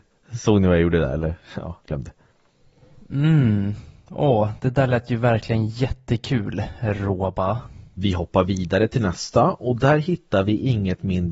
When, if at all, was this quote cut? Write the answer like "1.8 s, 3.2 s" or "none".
1.8 s